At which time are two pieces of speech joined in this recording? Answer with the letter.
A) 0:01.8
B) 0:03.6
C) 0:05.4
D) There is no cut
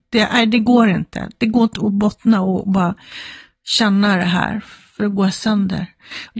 A